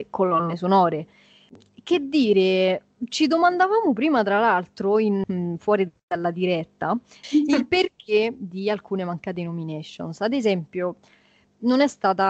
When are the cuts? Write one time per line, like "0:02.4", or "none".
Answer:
0:05.2
0:07.2